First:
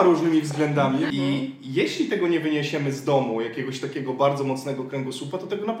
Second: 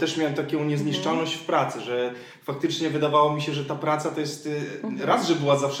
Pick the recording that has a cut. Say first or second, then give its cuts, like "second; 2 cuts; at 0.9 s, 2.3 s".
first; 1 cut; at 1.1 s